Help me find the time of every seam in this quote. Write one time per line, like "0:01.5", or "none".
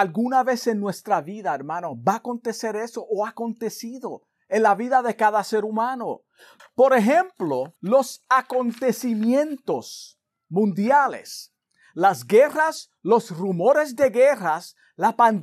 0:06.6
0:07.8